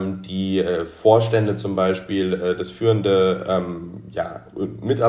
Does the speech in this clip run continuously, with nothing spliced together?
yes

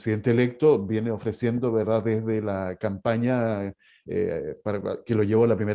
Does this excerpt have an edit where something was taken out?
no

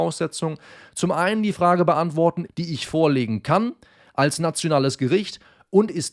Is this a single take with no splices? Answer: no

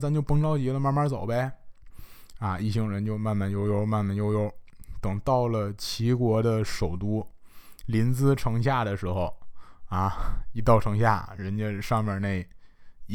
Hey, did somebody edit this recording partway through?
no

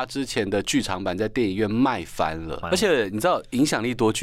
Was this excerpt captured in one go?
no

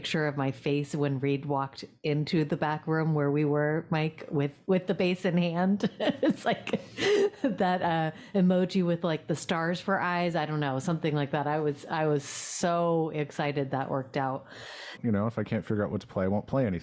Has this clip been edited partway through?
yes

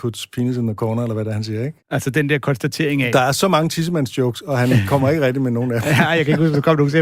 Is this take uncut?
no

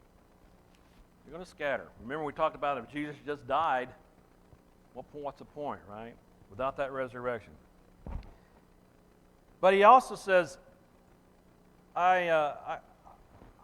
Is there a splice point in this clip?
no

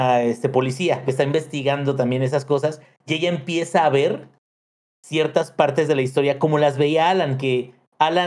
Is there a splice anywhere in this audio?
yes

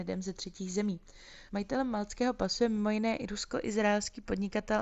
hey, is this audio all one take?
no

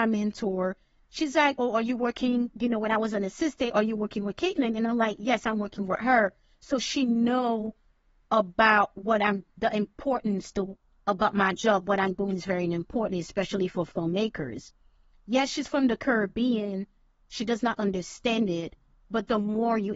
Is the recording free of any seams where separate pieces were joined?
yes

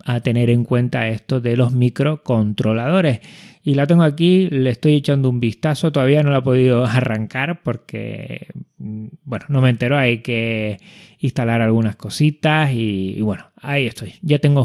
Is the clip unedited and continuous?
yes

